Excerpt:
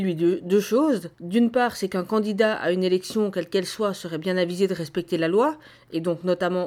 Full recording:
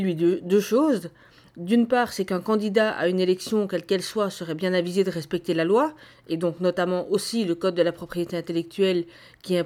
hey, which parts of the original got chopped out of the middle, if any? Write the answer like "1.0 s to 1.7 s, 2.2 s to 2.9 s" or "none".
1.1 s to 1.5 s